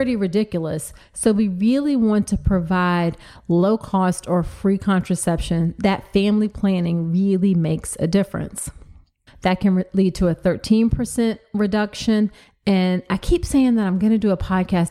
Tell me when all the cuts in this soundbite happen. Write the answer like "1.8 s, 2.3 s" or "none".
9.3 s